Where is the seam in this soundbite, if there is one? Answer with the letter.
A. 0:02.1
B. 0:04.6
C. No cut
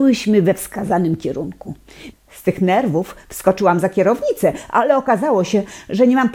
A